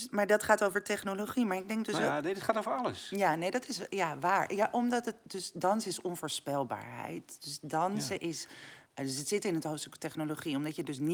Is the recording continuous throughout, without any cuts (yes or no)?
yes